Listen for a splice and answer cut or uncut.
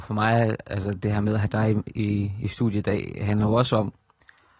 uncut